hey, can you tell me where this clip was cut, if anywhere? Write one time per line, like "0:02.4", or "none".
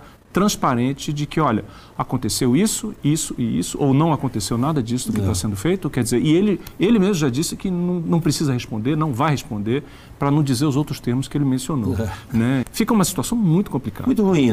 0:12.6